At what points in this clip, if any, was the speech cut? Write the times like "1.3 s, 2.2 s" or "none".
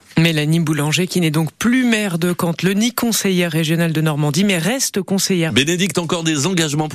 5.5 s